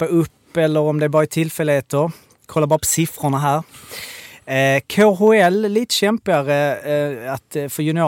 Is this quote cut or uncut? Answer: uncut